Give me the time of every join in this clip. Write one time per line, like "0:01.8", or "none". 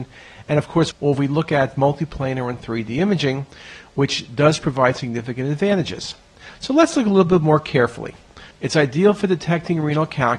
0:00.9
0:08.5